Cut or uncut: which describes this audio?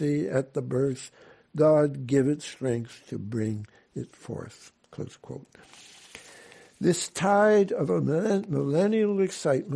uncut